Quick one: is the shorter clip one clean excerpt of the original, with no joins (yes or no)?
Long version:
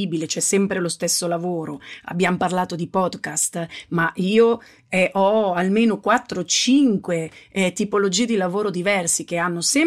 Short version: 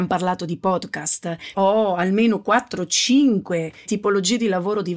no